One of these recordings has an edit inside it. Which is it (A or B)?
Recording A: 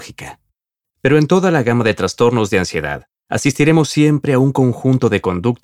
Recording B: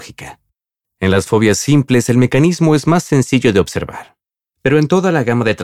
A